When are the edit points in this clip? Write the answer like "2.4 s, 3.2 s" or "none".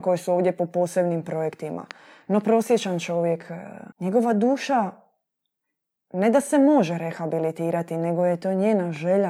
3.9 s